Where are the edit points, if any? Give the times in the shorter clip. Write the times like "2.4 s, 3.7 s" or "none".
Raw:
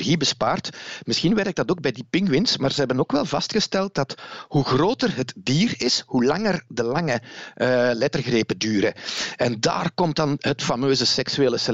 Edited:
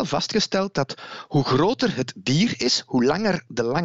none